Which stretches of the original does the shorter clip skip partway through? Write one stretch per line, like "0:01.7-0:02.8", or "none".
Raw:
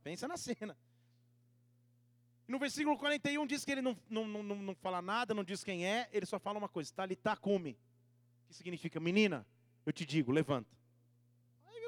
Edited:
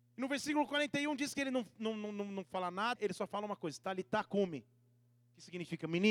0:05.3-0:06.1